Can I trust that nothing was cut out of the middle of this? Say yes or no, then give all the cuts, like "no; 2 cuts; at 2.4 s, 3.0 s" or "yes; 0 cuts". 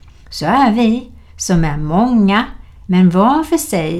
no; 1 cut; at 2.9 s